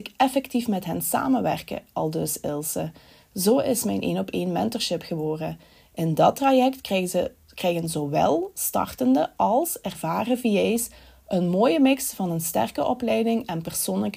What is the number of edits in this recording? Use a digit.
0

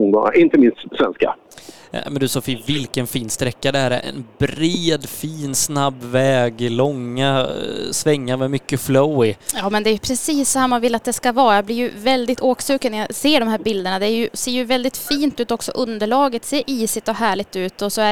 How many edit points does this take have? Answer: 0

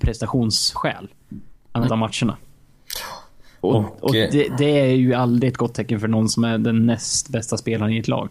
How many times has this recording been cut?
1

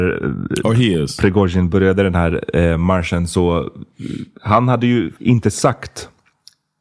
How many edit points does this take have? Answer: 1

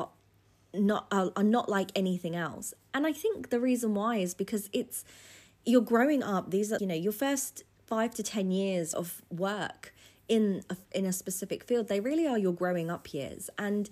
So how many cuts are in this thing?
2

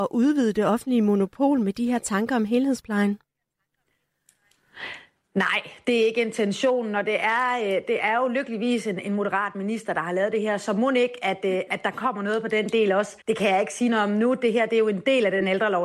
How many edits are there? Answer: 1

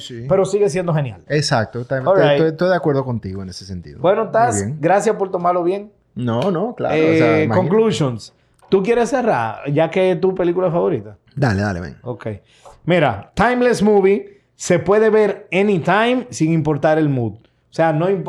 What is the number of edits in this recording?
1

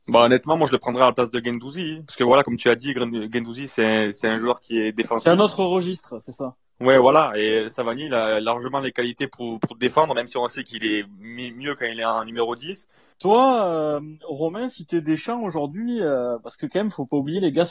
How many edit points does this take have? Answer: 1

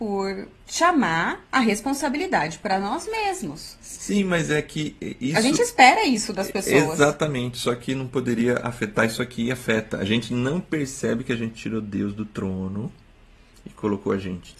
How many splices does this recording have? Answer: 1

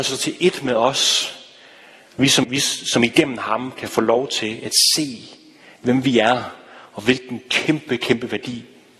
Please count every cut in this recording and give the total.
1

